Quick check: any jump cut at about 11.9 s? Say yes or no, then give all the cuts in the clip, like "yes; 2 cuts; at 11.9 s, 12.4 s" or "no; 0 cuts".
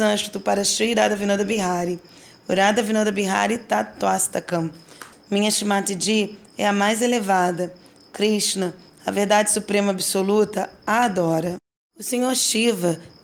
no; 1 cut; at 5.1 s